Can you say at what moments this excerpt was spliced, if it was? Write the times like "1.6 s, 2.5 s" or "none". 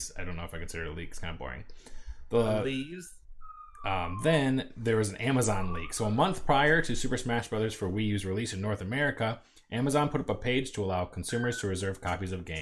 none